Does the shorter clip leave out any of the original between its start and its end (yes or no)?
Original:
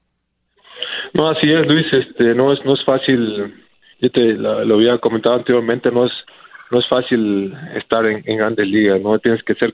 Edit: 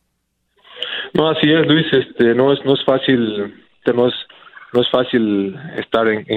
yes